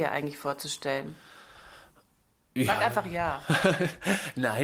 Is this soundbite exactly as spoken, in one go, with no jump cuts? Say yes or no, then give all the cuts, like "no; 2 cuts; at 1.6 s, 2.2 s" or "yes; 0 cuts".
yes; 0 cuts